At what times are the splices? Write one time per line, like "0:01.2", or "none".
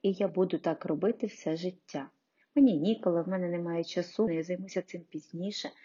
0:02.4
0:04.3